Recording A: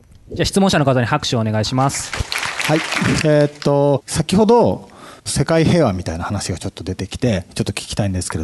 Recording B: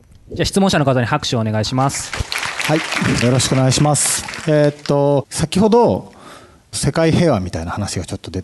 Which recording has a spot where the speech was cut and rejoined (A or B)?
A